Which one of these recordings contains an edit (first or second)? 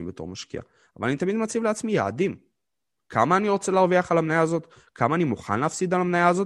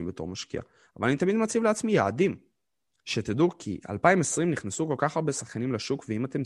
second